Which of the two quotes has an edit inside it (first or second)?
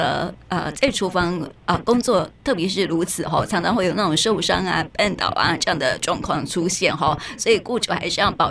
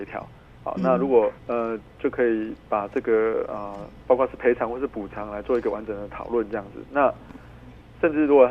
second